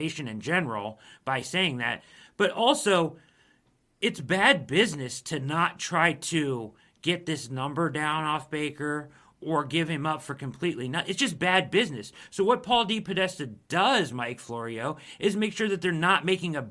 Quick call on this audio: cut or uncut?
uncut